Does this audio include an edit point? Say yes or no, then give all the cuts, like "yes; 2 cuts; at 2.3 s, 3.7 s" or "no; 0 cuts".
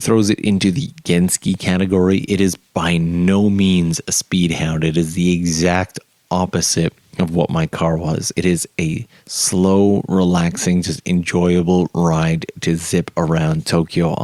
no; 0 cuts